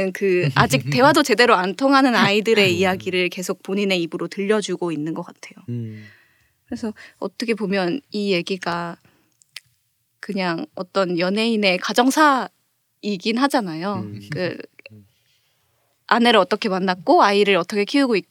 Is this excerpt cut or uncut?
uncut